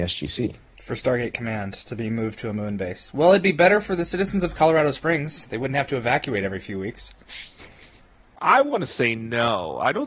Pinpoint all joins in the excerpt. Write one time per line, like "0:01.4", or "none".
none